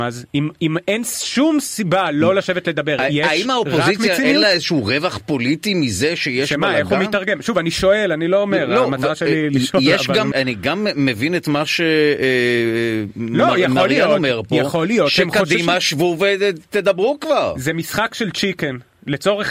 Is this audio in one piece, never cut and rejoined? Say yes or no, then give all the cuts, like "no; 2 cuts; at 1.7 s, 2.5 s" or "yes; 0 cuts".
no; 1 cut; at 10.3 s